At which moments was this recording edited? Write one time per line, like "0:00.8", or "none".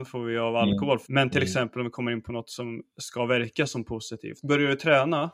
0:01.1
0:04.4